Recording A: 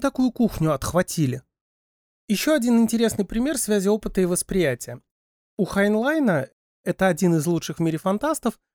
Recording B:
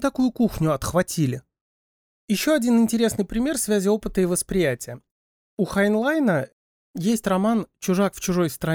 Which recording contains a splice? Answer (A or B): B